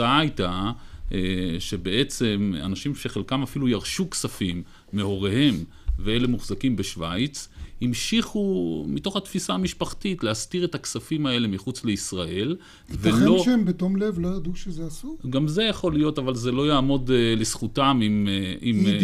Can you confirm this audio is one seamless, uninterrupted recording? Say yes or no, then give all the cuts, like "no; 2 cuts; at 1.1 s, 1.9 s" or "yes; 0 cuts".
yes; 0 cuts